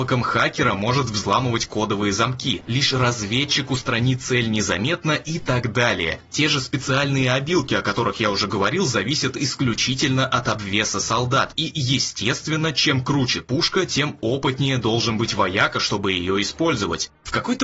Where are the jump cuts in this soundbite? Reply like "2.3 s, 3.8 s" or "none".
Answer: 2.7 s